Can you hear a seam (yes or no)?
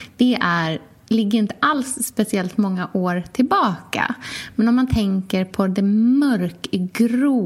no